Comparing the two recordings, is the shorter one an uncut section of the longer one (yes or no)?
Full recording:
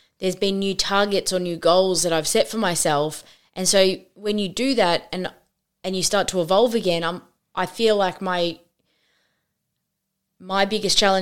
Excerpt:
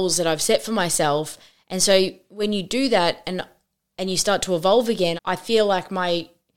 no